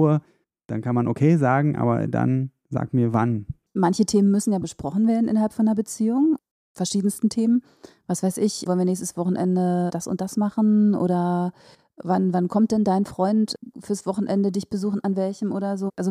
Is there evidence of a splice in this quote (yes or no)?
yes